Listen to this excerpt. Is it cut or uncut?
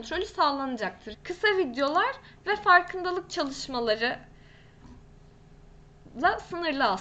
cut